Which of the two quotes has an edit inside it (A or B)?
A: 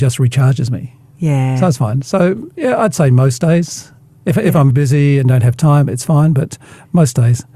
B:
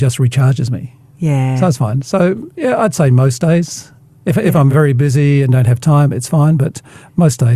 A